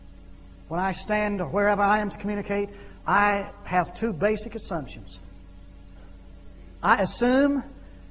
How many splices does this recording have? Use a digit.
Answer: 0